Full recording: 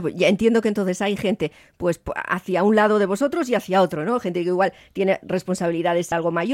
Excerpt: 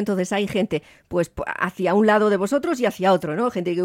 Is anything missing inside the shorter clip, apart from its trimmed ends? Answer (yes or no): no